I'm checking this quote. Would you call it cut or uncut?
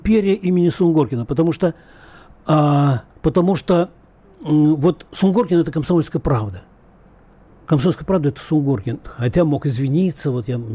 cut